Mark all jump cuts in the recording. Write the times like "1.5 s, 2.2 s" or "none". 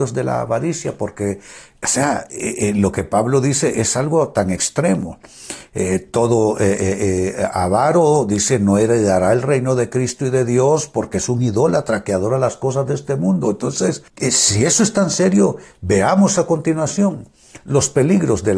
14.1 s